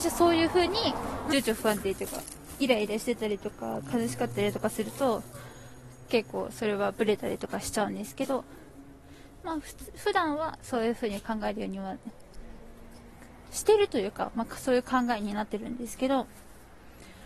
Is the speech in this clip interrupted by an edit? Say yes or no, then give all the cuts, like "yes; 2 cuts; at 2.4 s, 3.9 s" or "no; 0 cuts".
yes; 1 cut; at 1.3 s